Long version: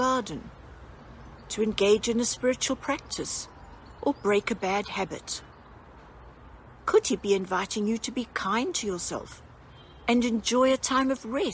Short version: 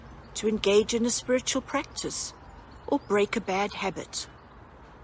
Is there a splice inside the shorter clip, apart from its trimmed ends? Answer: no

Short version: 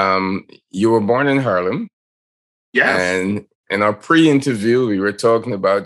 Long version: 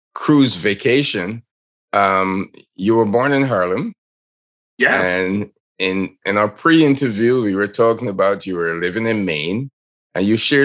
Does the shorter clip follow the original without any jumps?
no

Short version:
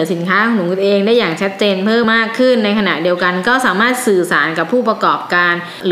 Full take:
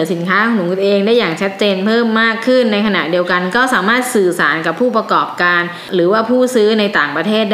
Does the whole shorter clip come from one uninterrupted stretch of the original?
no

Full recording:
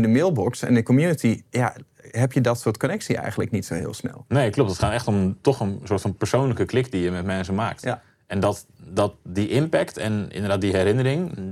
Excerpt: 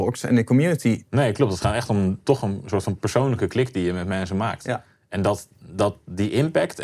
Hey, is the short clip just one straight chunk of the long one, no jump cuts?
no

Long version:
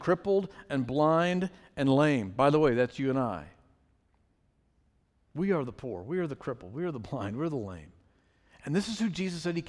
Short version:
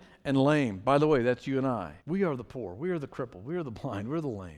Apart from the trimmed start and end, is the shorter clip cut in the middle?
yes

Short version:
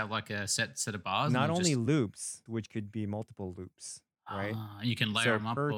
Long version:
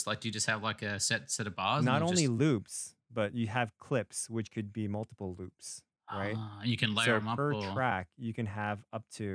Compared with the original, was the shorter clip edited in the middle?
yes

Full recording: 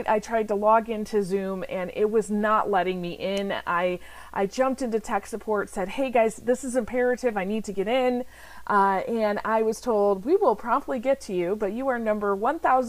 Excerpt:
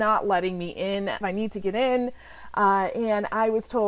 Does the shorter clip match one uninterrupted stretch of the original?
no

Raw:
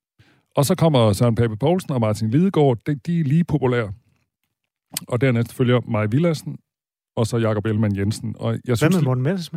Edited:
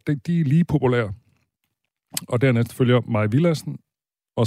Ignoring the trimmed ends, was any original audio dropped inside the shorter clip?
no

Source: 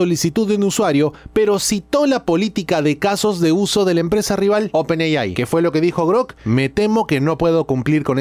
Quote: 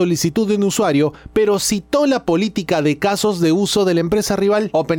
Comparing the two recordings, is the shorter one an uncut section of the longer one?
yes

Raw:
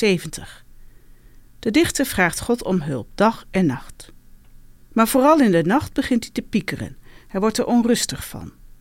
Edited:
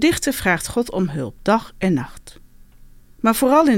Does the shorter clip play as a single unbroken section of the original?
yes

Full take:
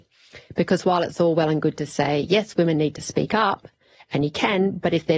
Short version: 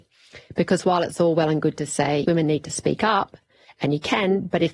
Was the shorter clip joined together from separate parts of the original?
yes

